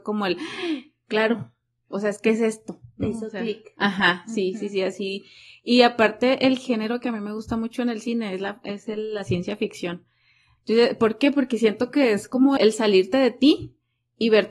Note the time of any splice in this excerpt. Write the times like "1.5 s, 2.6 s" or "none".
12.6 s